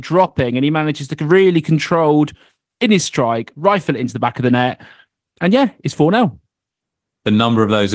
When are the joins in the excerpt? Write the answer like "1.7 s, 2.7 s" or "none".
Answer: none